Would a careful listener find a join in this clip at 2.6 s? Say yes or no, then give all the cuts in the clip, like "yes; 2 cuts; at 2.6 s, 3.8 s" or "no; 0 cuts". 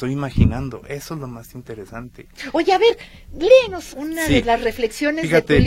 no; 1 cut; at 3.9 s